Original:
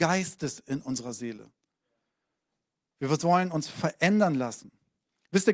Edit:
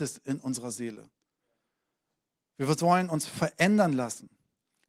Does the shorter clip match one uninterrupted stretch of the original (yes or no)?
yes